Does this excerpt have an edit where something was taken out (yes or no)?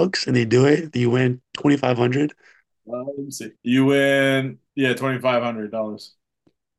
yes